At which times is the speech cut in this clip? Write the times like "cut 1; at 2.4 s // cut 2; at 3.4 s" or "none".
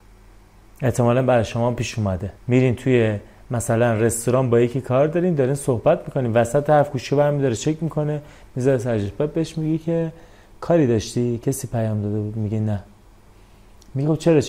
cut 1; at 2.4 s

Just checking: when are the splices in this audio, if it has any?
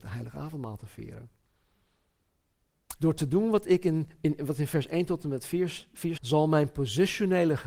cut 1; at 3.0 s // cut 2; at 6.2 s

